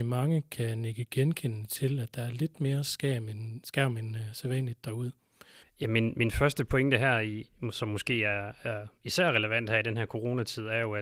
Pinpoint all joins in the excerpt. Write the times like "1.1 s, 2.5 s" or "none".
5.6 s

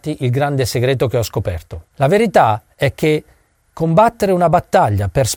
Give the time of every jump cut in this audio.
1.8 s

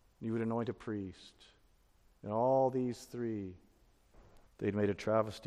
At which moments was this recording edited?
4.5 s

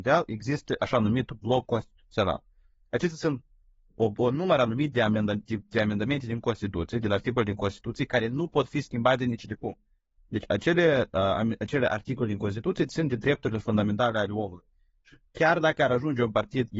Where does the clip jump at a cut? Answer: none

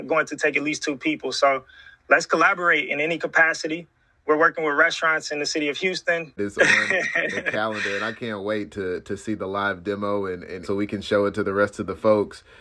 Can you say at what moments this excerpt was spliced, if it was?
6.4 s, 10.6 s

